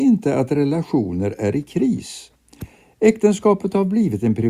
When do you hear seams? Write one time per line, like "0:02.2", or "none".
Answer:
none